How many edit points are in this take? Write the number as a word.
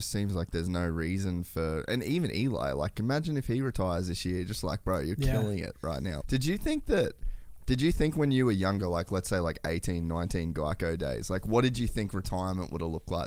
one